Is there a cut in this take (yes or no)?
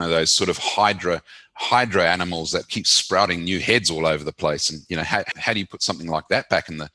yes